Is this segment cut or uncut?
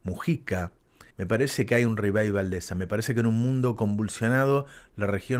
cut